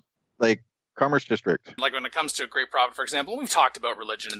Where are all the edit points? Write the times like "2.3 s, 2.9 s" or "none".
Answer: 1.8 s